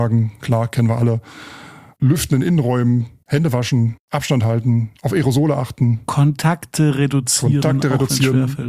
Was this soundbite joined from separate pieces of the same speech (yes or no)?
no